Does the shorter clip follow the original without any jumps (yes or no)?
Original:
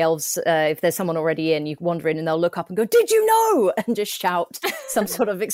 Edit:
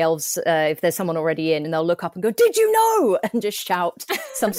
no